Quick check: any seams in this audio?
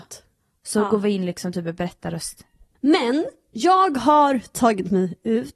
yes; 1 cut; at 2.7 s

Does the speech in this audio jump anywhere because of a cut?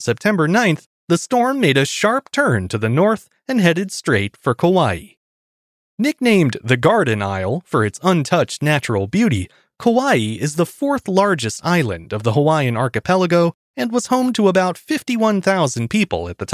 no; 0 cuts

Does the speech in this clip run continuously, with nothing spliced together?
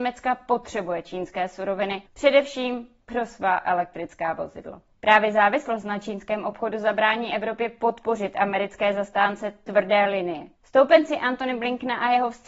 no; 1 cut; at 10.5 s

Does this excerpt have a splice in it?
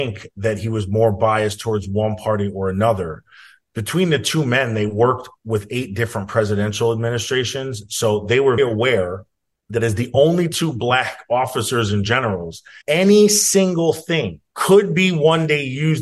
yes; 3 cuts; at 8.6 s, 12.8 s, 14.5 s

